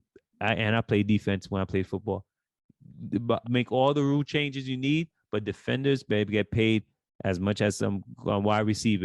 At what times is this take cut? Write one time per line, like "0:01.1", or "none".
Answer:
0:03.4